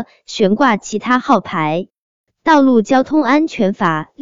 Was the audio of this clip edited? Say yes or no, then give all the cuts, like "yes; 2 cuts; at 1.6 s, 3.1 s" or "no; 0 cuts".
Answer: no; 0 cuts